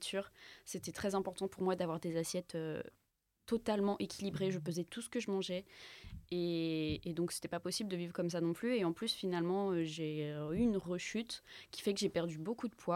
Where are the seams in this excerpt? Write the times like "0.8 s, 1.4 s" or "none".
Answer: none